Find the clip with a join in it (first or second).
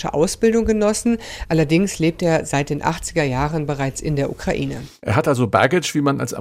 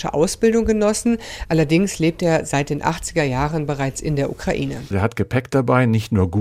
second